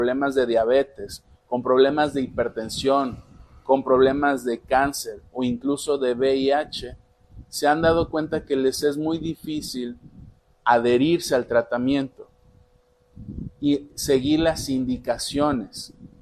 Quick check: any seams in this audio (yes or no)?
no